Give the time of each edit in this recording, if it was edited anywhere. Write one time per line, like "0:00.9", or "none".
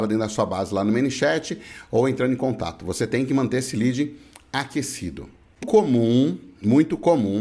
0:05.6